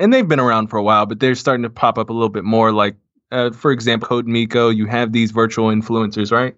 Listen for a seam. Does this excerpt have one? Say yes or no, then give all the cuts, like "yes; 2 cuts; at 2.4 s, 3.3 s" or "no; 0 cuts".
yes; 1 cut; at 4.0 s